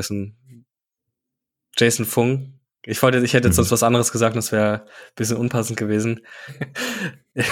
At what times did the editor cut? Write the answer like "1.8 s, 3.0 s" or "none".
6.5 s